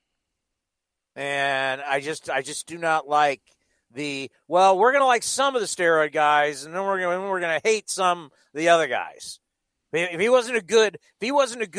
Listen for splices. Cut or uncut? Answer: uncut